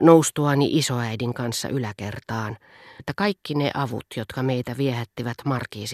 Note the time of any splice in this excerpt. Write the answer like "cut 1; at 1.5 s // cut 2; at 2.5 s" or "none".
cut 1; at 3.0 s